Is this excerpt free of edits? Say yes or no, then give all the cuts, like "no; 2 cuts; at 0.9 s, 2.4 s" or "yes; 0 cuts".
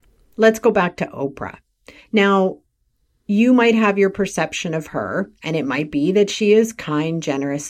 yes; 0 cuts